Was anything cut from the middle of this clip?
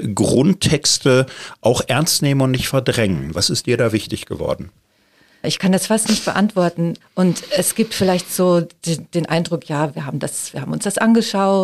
yes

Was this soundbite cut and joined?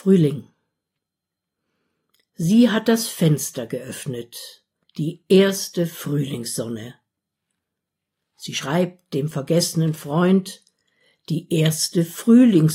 yes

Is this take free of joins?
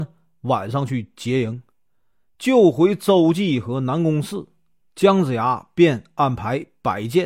no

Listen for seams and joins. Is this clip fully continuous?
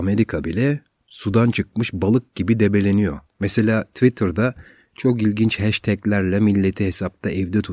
no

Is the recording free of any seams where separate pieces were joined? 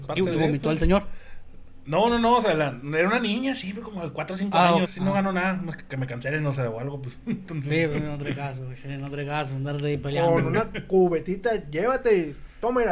no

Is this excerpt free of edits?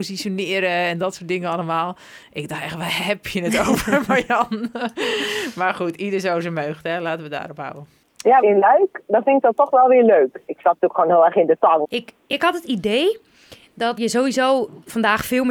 no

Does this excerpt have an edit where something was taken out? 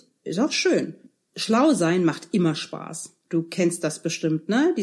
yes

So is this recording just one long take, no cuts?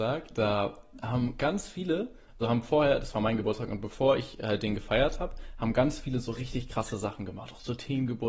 no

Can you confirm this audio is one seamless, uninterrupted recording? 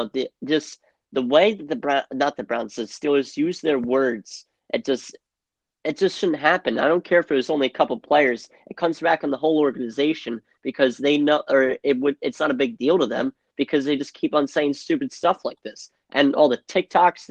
yes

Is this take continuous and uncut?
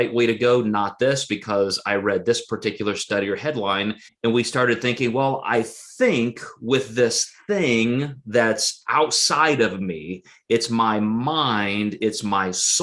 no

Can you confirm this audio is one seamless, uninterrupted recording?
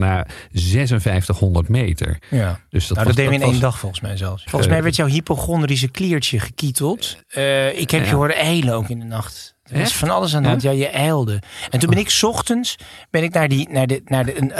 no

